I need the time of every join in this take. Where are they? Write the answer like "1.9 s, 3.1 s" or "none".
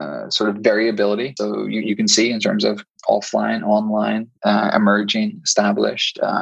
1.4 s